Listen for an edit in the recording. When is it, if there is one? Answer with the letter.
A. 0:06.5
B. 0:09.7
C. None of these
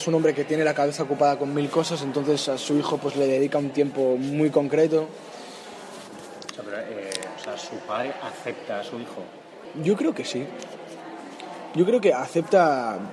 A